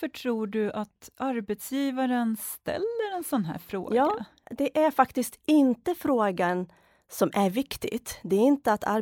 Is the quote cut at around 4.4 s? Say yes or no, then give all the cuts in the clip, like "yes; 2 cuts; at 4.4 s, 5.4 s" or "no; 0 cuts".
yes; 1 cut; at 4.4 s